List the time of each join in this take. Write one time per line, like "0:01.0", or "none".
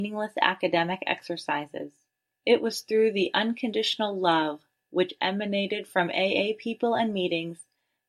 0:02.3